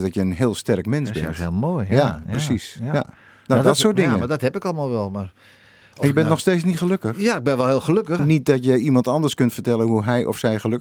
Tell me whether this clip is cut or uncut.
cut